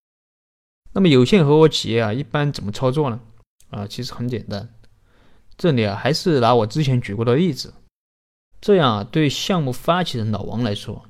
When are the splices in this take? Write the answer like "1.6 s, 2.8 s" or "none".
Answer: 8.5 s

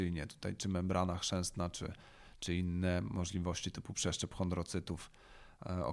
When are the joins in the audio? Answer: none

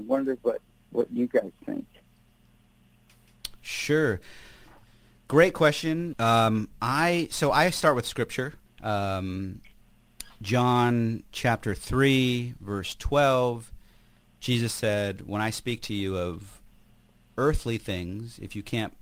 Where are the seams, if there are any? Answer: 6.1 s, 8.7 s

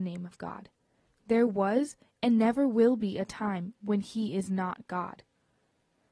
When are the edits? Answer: 1.1 s

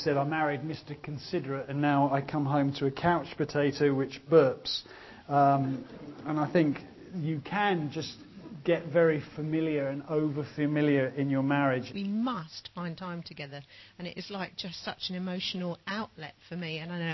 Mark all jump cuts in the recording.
11.9 s

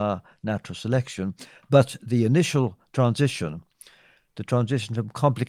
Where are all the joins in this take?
none

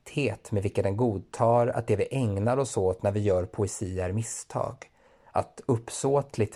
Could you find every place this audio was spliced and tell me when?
none

